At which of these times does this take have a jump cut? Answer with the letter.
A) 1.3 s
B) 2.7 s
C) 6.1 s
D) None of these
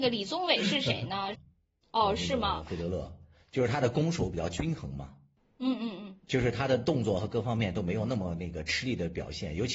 A